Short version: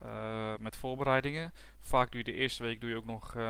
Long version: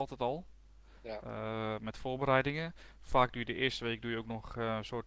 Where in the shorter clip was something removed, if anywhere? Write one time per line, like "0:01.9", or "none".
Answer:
none